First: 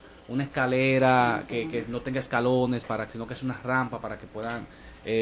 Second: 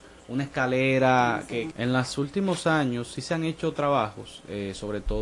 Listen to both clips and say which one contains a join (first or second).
second